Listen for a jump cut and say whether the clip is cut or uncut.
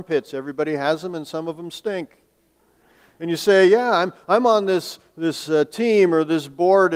uncut